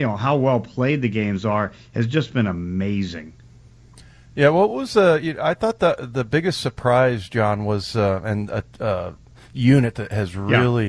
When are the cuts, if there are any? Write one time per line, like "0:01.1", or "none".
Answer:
none